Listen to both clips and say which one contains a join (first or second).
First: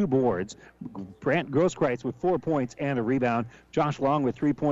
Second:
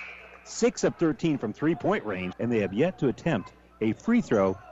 second